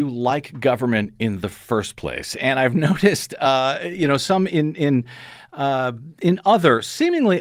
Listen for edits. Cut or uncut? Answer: uncut